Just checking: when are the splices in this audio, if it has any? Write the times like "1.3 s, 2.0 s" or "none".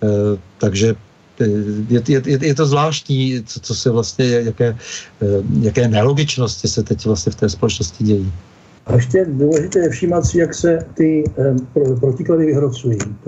none